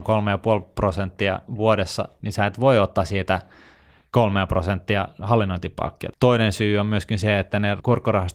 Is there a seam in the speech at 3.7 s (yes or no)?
no